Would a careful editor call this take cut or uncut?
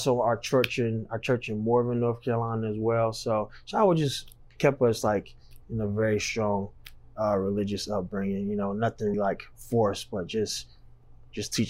cut